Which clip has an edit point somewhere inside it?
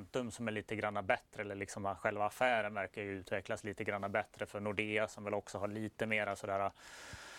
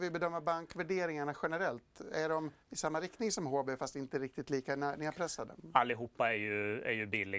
second; 1 cut; at 2.6 s

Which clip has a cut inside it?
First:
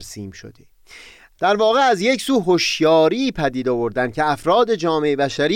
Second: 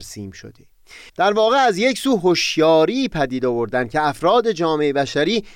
second; 1 cut; at 1.1 s

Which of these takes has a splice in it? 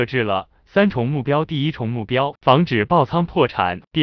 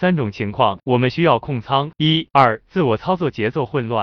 second; 1 cut; at 2.3 s

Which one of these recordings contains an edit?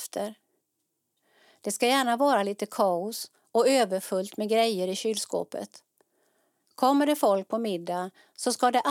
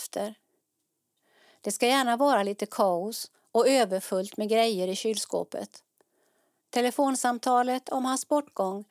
second; 1 cut; at 6.6 s

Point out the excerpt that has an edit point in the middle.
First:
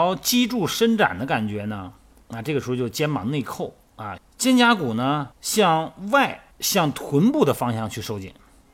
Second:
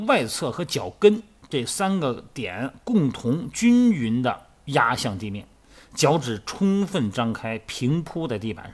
first; 3 cuts; at 4.2 s, 5.3 s, 6.5 s

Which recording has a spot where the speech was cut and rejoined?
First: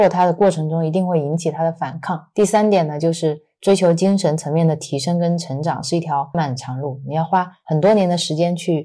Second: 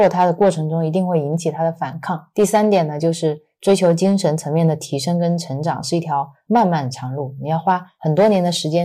first; 1 cut; at 6.3 s

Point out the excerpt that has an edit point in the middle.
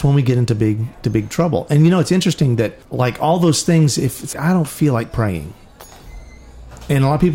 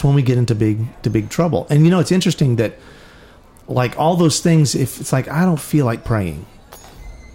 first; 2 cuts; at 2.8 s, 4.3 s

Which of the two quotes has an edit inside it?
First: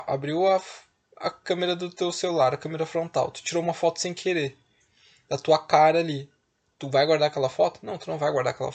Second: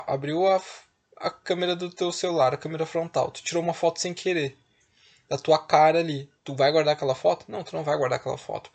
second; 1 cut; at 6.4 s

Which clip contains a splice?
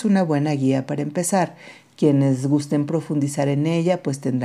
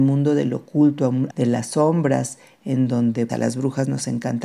second; 2 cuts; at 1.3 s, 3.3 s

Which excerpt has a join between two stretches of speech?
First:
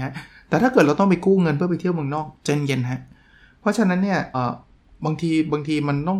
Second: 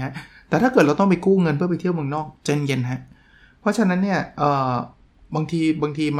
first; 1 cut; at 4.3 s

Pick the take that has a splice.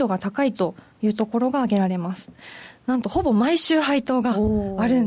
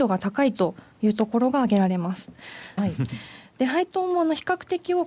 second; 1 cut; at 2.8 s

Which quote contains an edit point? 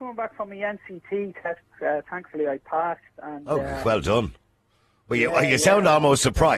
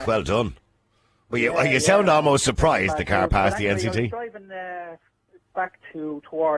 second; 1 cut; at 5.4 s

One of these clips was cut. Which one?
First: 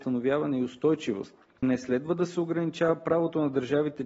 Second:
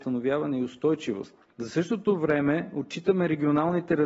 first; 1 cut; at 1.5 s

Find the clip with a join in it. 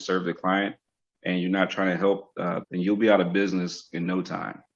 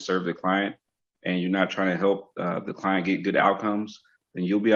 first; 1 cut; at 2.6 s

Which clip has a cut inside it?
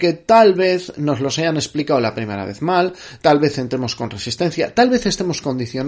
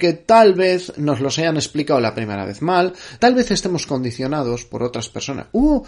second; 1 cut; at 3.2 s

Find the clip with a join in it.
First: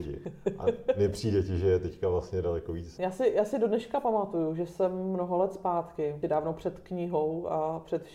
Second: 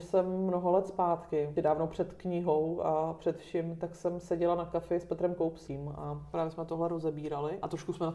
first; 1 cut; at 3.0 s

